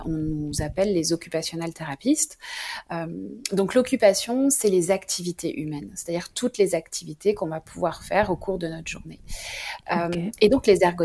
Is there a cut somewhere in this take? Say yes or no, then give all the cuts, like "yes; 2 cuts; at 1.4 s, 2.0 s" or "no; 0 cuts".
no; 0 cuts